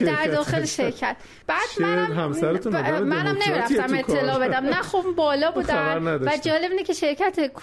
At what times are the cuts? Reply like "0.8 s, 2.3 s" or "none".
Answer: 1.4 s